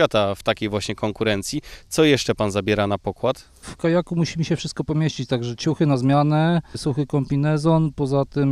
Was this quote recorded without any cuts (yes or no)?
yes